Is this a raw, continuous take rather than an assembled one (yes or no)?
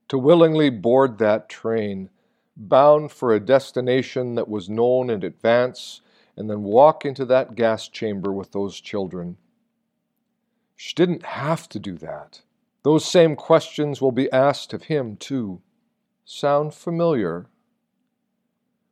no